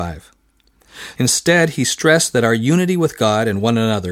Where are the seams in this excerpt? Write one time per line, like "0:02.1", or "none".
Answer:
0:01.2